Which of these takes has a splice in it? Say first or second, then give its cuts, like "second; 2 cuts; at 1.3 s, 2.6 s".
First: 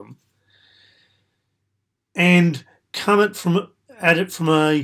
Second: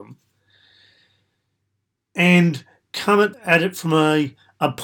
second; 1 cut; at 3.3 s